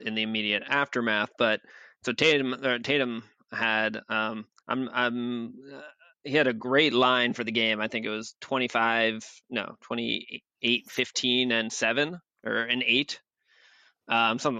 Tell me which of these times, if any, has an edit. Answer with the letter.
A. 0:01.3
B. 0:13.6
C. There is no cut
C